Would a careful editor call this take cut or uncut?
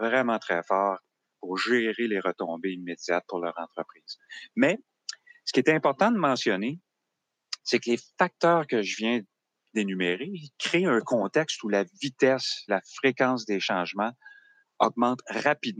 cut